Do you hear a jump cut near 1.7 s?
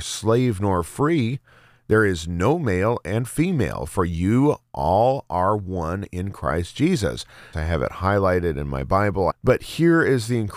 no; 2 cuts; at 7.5 s, 9.3 s

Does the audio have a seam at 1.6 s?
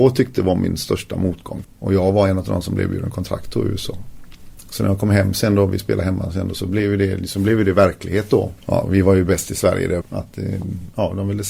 yes; 3 cuts; at 1.6 s, 8.6 s, 10.0 s

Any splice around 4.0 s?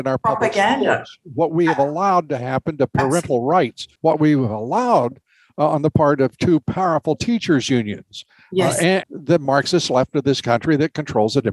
yes; 2 cuts; at 4.0 s, 9.0 s

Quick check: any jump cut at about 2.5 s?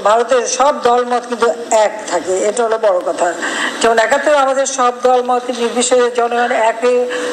yes; 1 cut; at 2.5 s

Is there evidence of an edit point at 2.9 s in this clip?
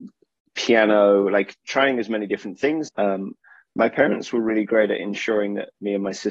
yes; 1 cut; at 2.9 s

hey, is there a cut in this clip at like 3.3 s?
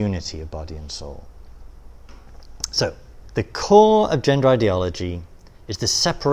yes; 1 cut; at 3.3 s

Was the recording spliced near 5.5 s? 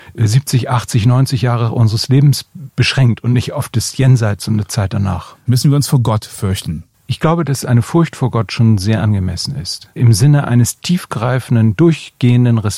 yes; 1 cut; at 5.5 s

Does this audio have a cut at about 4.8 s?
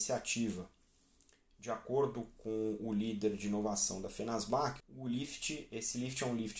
yes; 1 cut; at 4.8 s

